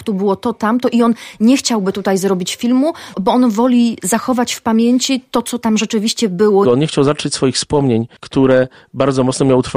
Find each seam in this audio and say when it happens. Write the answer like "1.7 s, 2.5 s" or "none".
3.1 s, 6.6 s, 8.2 s